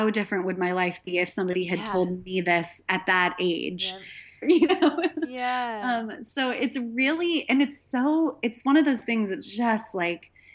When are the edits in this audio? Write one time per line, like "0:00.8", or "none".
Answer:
0:04.4